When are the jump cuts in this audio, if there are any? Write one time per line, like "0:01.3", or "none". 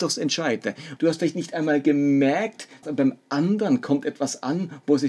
0:01.0
0:02.8